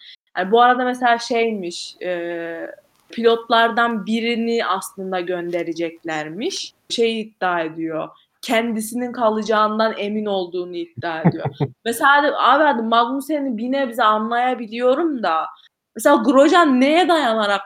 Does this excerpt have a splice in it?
yes; 2 cuts; at 3.1 s, 6.9 s

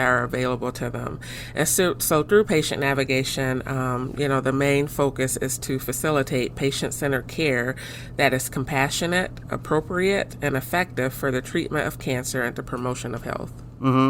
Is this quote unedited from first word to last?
yes; 0 cuts

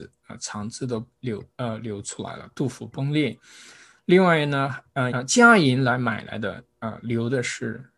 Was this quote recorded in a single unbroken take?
no; 1 cut; at 5.1 s

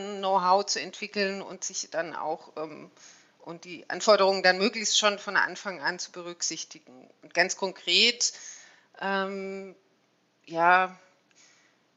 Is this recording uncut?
yes; 0 cuts

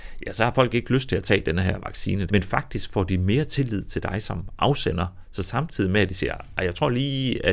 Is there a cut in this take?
yes; 1 cut; at 2.3 s

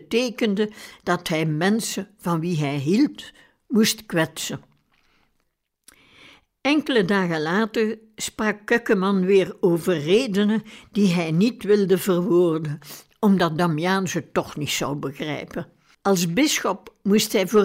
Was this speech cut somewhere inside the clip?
yes; 1 cut; at 15.9 s

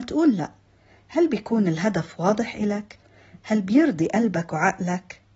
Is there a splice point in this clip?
no; 0 cuts

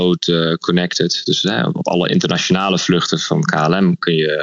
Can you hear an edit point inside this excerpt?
no; 0 cuts

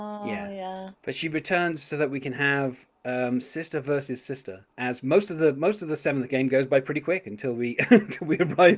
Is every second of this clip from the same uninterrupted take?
yes; 0 cuts

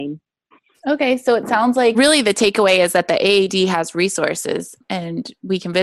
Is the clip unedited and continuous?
yes; 0 cuts

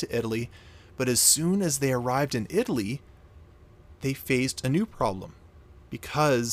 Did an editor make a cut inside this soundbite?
no; 0 cuts

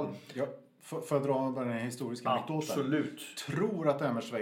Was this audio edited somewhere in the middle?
no; 0 cuts

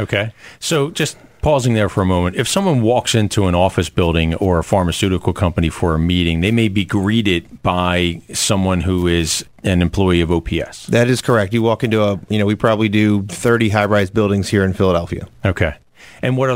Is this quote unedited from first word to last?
yes; 0 cuts

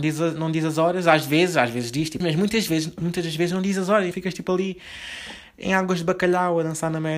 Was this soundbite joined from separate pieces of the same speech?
yes; 2 cuts; at 2.2 s, 4.1 s

